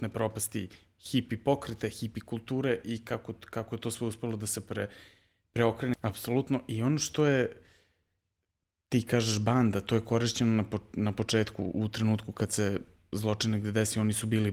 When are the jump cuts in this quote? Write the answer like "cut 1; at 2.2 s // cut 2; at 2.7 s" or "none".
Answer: cut 1; at 5.9 s